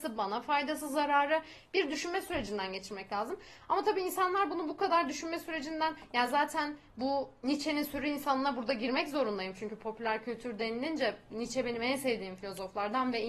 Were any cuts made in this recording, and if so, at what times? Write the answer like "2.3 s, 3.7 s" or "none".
none